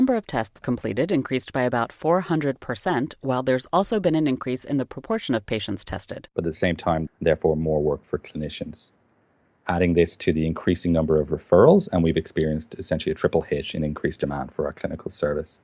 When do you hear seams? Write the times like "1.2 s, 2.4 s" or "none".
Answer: 7.1 s